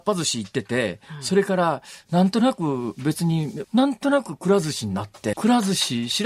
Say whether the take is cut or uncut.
cut